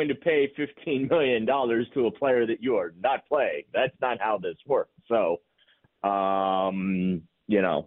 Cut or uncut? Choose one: cut